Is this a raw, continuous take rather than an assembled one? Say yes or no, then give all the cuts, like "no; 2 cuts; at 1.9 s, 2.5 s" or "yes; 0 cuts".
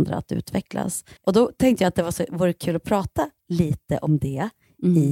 no; 1 cut; at 1.2 s